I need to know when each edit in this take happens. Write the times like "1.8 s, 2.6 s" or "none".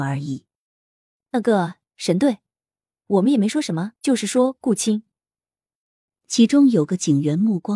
4.0 s